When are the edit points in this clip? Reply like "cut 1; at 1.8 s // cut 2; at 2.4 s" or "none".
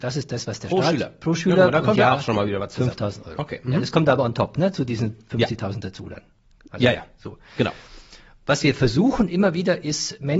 none